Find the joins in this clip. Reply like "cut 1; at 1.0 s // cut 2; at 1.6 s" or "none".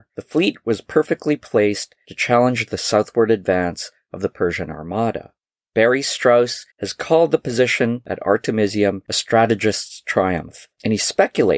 cut 1; at 6.7 s